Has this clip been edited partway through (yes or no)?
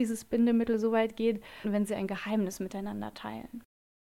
yes